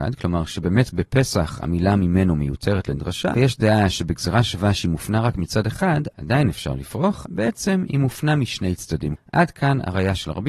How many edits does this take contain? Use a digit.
3